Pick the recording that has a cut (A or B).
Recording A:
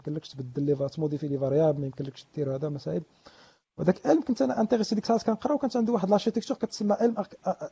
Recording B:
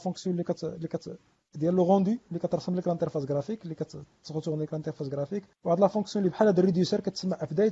B